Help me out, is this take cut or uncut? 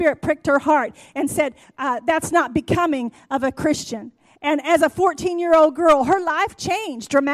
uncut